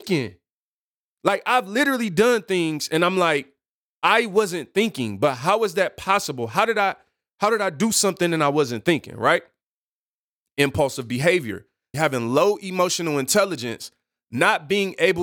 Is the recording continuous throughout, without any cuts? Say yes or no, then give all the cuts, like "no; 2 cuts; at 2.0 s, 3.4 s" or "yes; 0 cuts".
no; 1 cut; at 11.9 s